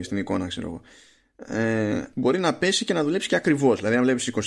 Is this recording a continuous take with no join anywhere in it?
no; 1 cut; at 2.1 s

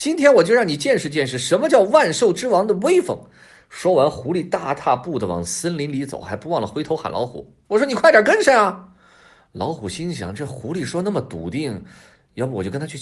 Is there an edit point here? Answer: no; 0 cuts

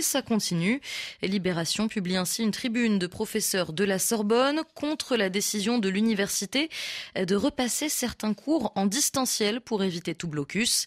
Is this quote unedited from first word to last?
yes; 0 cuts

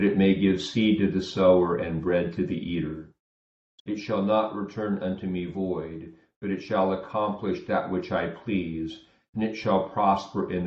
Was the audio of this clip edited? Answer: yes; 1 cut; at 3.8 s

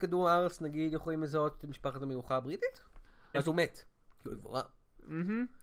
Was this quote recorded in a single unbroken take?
no; 1 cut; at 3.3 s

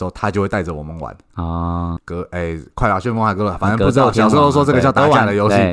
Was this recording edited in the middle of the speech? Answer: yes; 1 cut; at 2.0 s

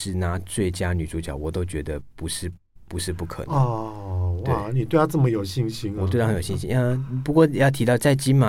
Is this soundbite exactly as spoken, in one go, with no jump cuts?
yes; 0 cuts

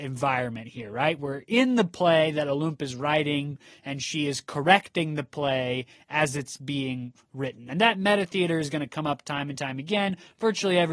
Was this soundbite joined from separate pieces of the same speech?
no; 0 cuts

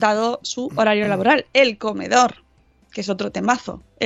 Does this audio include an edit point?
no; 0 cuts

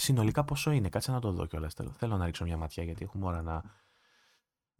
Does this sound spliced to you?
no; 0 cuts

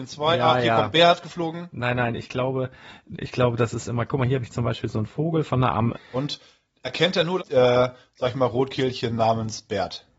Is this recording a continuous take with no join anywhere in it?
no; 2 cuts; at 5.9 s, 7.4 s

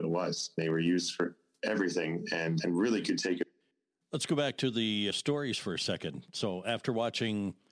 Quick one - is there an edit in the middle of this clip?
no; 0 cuts

